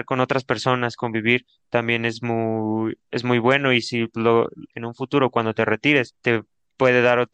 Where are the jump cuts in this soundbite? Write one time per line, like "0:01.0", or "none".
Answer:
0:04.7